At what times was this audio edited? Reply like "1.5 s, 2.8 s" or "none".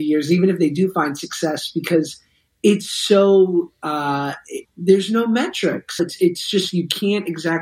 4.7 s, 6.0 s